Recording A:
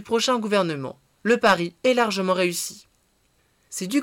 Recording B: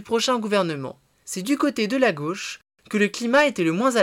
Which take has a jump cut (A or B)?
B